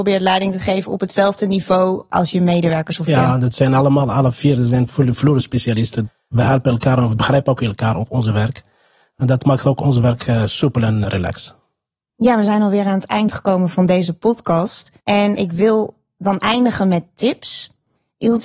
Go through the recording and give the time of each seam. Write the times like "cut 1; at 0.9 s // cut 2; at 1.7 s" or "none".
cut 1; at 11.0 s // cut 2; at 15.0 s

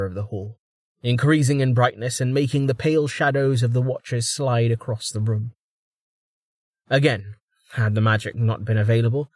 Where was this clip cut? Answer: none

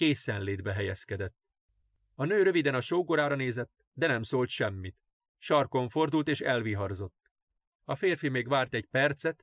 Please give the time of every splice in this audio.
none

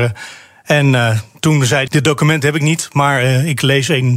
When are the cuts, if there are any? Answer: cut 1; at 1.9 s

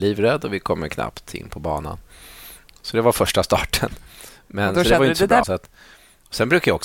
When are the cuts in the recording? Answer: cut 1; at 5.4 s

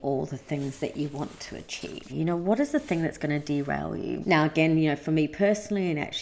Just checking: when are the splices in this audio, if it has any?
cut 1; at 2.1 s // cut 2; at 4.2 s

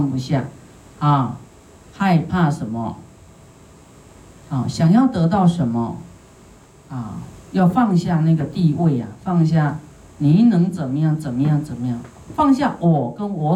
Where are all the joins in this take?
none

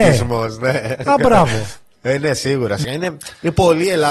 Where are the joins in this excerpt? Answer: cut 1; at 2.8 s

